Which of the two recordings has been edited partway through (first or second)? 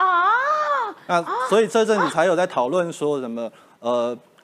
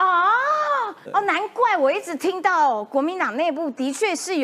second